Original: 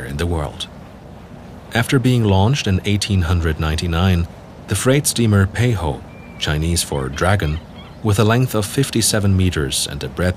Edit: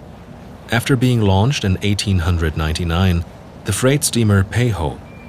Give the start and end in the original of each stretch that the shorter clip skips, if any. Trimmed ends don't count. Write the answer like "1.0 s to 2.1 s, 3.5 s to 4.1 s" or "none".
none